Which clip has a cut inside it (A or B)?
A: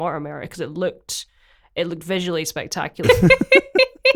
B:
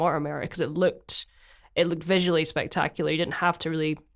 A